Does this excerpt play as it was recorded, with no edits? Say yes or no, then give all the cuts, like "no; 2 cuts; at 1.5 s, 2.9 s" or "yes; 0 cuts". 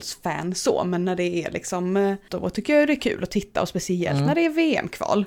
no; 1 cut; at 2.3 s